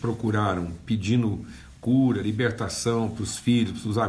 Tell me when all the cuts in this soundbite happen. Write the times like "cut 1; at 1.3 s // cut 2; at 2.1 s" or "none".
none

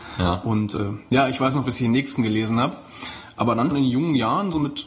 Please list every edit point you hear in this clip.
cut 1; at 1.6 s // cut 2; at 3.7 s

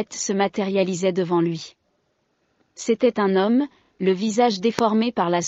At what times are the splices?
none

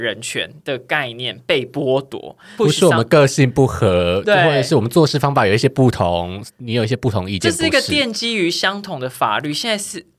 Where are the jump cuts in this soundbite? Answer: cut 1; at 2.6 s

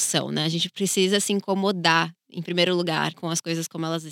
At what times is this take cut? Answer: cut 1; at 3.1 s

